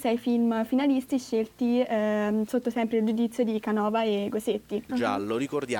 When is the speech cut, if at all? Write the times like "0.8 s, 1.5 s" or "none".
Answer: 4.9 s